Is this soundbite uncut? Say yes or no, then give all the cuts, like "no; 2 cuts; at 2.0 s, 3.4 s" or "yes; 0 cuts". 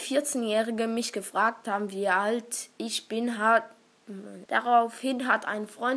no; 1 cut; at 4.5 s